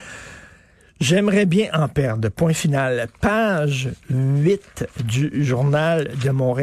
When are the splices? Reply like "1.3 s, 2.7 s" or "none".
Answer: none